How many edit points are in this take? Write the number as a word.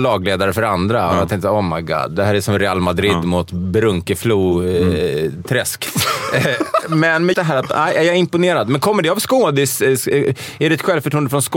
one